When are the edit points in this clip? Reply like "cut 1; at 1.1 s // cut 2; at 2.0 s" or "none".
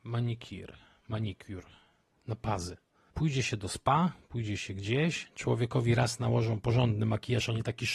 cut 1; at 3.1 s